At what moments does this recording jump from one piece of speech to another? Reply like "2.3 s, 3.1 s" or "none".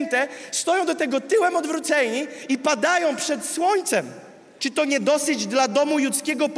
4.6 s